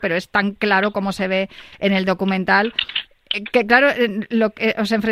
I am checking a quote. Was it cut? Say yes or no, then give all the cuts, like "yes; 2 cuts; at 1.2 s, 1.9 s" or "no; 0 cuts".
no; 0 cuts